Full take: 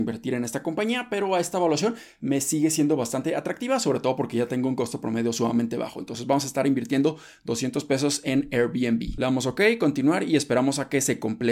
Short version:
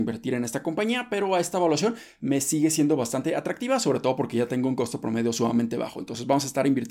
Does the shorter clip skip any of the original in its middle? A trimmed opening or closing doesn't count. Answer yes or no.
no